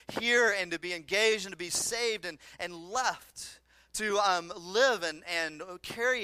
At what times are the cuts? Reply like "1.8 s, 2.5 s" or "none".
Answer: none